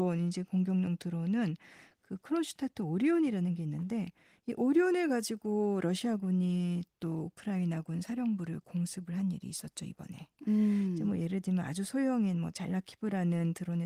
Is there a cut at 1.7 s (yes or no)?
no